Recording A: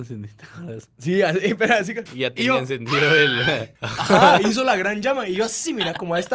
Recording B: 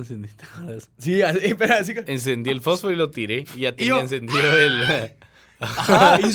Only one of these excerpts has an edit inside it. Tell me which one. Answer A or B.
A